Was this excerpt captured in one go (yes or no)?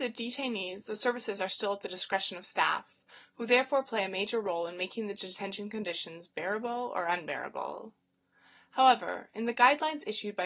yes